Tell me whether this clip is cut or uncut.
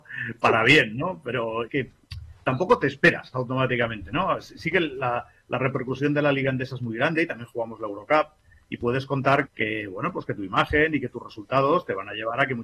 cut